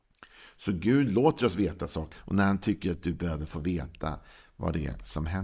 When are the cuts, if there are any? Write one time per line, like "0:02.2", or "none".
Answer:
0:02.1